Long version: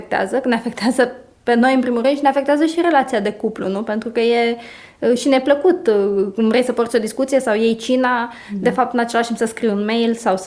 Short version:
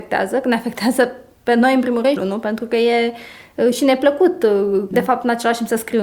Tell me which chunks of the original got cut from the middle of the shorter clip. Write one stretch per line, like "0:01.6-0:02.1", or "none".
0:02.2-0:03.6
0:06.3-0:08.6